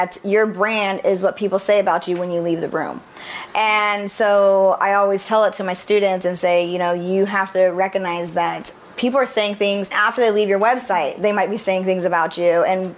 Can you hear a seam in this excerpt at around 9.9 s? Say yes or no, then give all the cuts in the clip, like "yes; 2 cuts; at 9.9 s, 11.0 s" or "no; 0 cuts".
yes; 1 cut; at 9.9 s